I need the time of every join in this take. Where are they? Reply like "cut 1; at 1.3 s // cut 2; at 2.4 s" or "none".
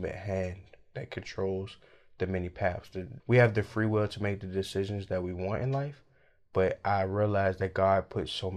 cut 1; at 3.2 s